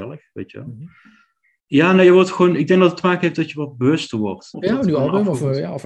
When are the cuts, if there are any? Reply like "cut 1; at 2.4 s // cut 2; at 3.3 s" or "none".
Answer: cut 1; at 1.6 s // cut 2; at 4.5 s